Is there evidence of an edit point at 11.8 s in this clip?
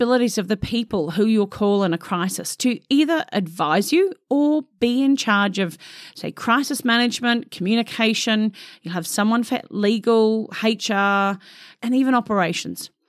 yes; 1 cut; at 11.8 s

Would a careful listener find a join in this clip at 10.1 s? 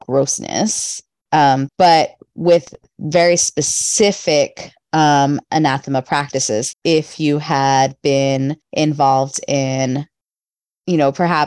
no; 3 cuts; at 1.7 s, 6.7 s, 8.6 s

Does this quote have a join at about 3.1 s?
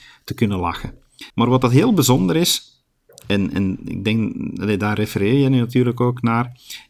no; 1 cut; at 1.3 s

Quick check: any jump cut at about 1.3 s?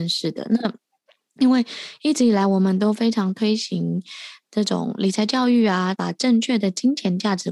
no; 1 cut; at 5.9 s

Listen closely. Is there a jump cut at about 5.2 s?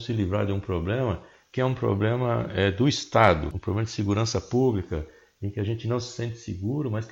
no; 0 cuts

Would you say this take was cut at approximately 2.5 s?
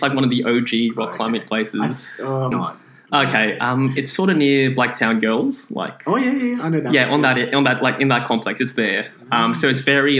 yes; 1 cut; at 2.5 s

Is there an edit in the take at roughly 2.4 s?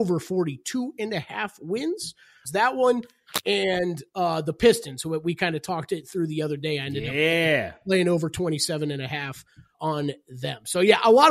yes; 2 cuts; at 2.4 s, 9.7 s

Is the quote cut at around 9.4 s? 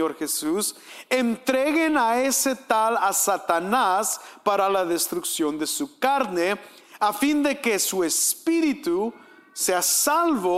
no; 0 cuts

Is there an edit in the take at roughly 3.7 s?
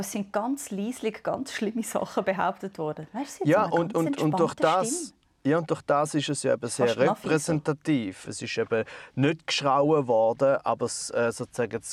no; 1 cut; at 8.2 s

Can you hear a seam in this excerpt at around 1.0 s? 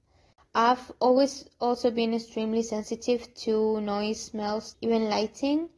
no; 1 cut; at 4.7 s

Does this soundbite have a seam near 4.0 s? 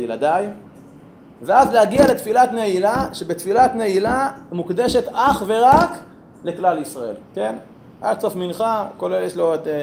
no; 2 cuts; at 1.4 s, 7.2 s

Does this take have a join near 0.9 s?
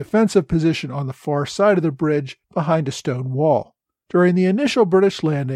no; 2 cuts; at 2.4 s, 4.0 s

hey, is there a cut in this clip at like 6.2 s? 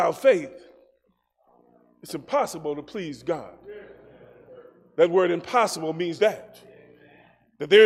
yes; 1 cut; at 6.2 s

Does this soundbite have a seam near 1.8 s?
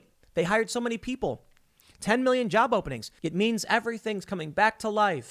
yes; 2 cuts; at 1.8 s, 3.2 s

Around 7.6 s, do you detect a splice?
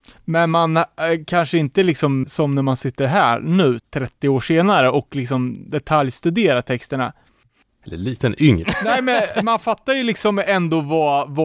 yes; 3 cuts; at 2.2 s, 3.8 s, 7.6 s

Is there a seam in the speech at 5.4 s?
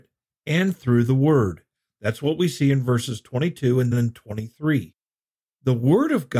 no; 1 cut; at 3.9 s

